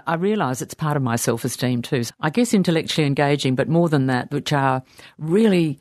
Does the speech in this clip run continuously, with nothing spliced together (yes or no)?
no